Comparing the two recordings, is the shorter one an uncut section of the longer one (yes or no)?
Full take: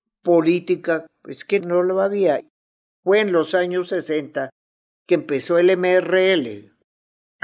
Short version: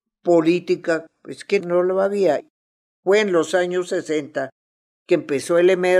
yes